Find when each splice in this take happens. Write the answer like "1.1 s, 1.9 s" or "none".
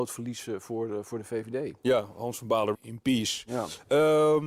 2.7 s